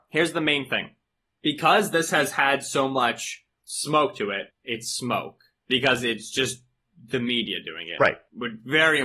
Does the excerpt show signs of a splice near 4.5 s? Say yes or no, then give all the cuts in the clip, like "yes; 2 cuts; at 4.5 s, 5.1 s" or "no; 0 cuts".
yes; 1 cut; at 4.5 s